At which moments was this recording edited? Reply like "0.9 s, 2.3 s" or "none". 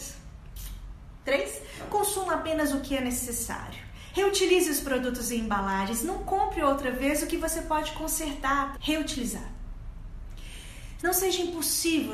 4.1 s, 8.7 s, 11.0 s